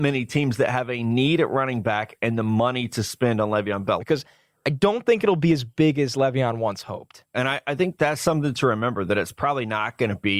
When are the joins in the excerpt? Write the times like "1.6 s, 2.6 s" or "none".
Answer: 4.0 s, 7.3 s

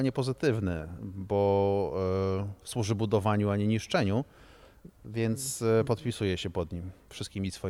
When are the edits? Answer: none

